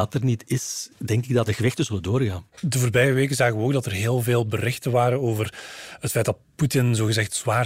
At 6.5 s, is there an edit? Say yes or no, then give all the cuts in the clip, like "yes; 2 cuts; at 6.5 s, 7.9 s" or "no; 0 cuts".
no; 1 cut; at 2.5 s